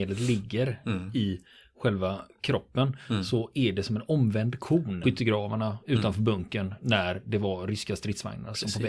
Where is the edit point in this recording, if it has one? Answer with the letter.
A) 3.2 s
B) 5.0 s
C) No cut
B